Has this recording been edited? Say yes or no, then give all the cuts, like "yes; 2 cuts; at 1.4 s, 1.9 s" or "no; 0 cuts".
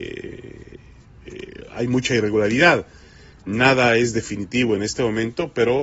no; 0 cuts